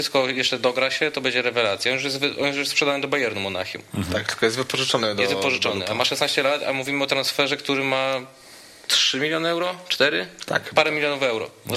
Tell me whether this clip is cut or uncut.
uncut